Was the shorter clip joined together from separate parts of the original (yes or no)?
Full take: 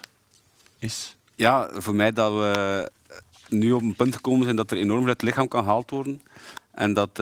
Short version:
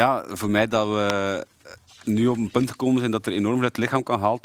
no